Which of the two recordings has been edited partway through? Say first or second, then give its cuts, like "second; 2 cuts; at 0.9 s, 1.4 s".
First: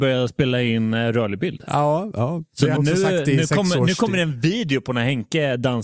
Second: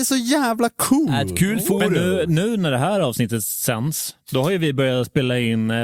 first; 1 cut; at 2.8 s